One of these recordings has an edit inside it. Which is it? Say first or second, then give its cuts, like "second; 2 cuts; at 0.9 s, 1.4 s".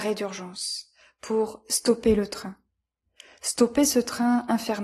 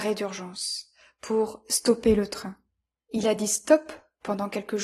second; 1 cut; at 3.0 s